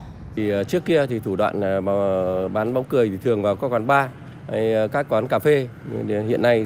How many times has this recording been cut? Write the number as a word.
zero